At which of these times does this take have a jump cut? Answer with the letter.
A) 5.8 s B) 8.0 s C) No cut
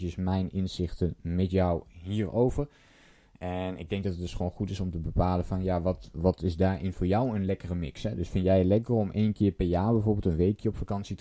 C